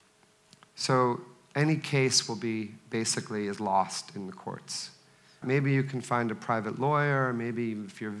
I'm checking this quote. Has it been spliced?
yes; 1 cut; at 5.4 s

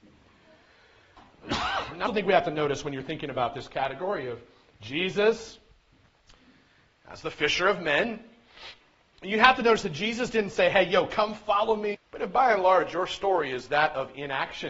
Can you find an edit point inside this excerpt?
yes; 2 cuts; at 2.1 s, 11.9 s

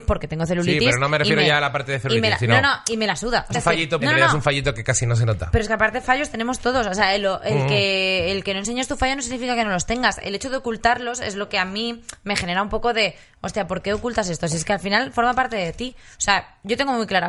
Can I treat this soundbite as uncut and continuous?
no; 1 cut; at 4.0 s

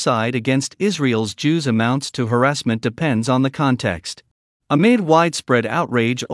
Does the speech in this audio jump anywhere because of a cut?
yes; 1 cut; at 4.6 s

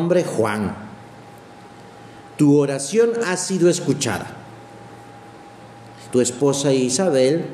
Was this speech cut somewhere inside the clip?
yes; 2 cuts; at 2.2 s, 6.1 s

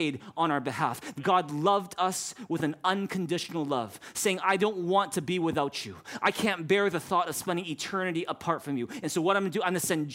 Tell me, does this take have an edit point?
yes; 1 cut; at 1.1 s

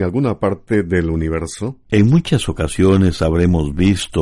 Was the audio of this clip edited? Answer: yes; 1 cut; at 1.9 s

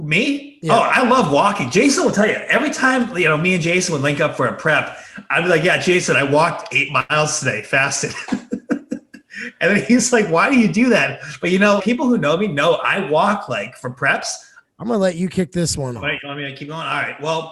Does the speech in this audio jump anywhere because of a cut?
yes; 2 cuts; at 11.8 s, 14.6 s

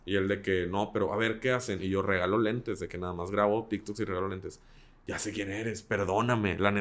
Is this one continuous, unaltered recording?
yes; 0 cuts

